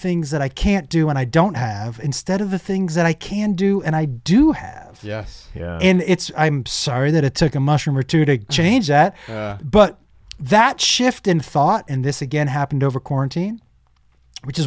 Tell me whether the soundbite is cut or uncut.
uncut